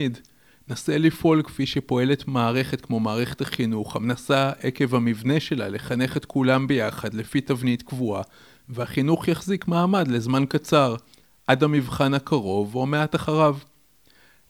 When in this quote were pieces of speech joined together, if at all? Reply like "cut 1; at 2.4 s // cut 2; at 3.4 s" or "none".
none